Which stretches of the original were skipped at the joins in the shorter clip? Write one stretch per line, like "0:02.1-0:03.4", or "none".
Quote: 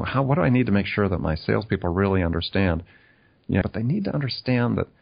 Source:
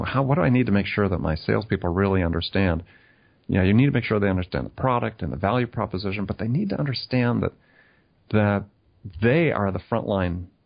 0:03.6-0:06.3